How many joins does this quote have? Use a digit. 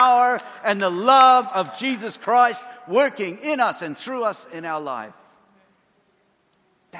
0